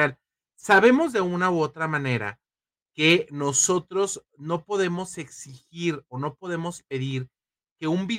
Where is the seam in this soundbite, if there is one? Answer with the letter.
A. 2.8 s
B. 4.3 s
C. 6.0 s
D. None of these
D